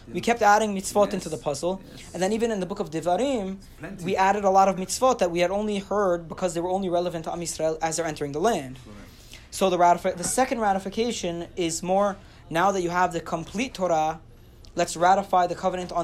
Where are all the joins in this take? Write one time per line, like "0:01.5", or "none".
none